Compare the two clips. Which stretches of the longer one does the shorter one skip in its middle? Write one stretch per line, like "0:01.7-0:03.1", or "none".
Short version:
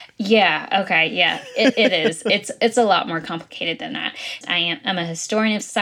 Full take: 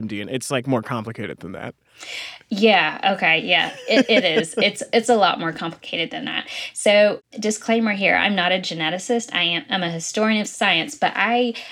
0:06.7-0:09.3

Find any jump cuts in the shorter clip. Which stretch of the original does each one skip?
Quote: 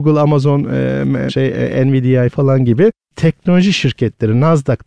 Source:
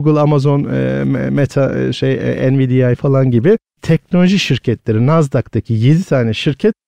0:01.3-0:01.9

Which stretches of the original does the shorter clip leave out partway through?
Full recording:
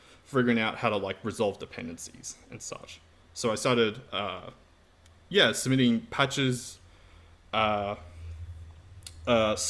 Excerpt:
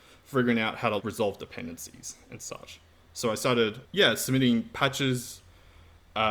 0:01.0-0:01.2
0:04.0-0:05.2

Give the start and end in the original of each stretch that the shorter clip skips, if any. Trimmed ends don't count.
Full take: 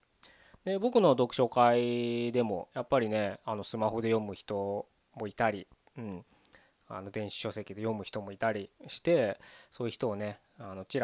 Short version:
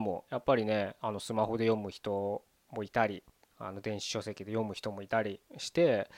0:05.9-0:06.7

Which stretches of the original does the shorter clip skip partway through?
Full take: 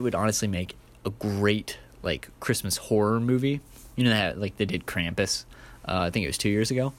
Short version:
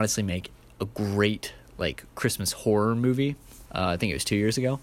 0:03.9-0:05.8

